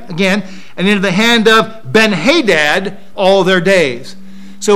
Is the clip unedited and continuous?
no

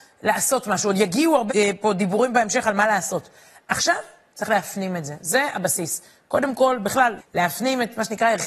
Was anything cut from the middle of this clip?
yes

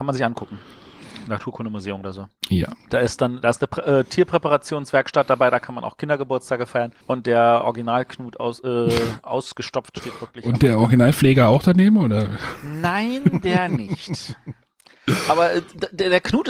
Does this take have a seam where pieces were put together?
yes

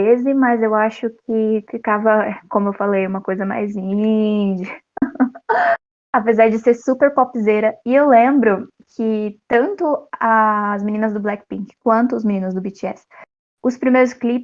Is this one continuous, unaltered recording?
yes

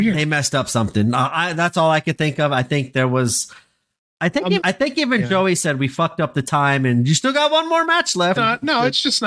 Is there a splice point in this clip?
yes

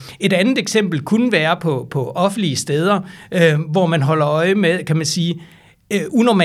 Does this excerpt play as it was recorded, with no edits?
yes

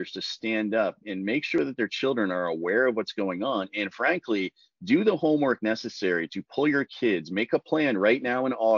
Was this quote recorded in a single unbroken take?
no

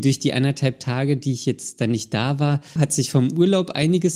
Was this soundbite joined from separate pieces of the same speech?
yes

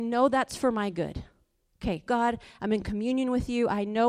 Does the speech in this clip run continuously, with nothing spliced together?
no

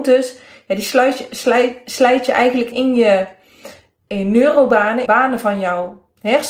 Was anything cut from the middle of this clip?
yes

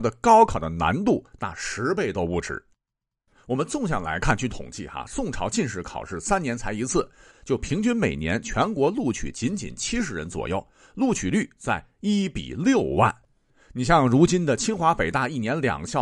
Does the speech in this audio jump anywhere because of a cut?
yes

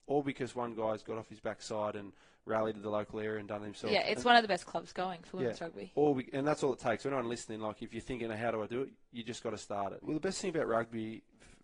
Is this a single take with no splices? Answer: no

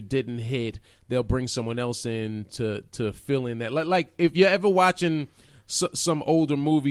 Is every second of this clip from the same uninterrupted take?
yes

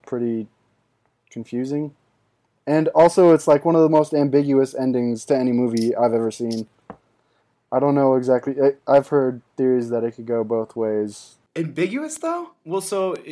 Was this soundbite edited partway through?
no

